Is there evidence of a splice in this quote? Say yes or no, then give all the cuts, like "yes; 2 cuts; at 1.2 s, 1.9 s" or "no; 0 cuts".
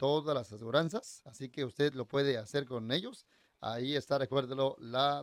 no; 0 cuts